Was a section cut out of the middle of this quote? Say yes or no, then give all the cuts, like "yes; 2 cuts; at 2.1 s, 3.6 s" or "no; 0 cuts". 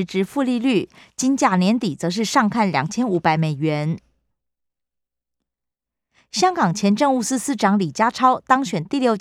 no; 0 cuts